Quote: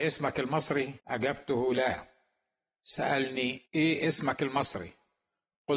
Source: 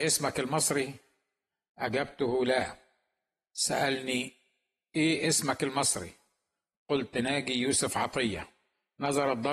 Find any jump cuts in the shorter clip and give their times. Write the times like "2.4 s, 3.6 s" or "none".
1.0 s, 3.7 s